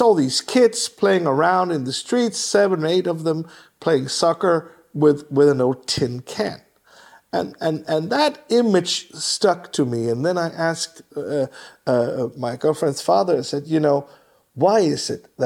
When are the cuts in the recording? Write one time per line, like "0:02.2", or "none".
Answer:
none